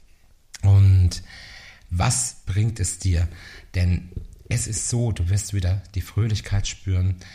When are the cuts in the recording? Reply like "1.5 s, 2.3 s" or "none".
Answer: none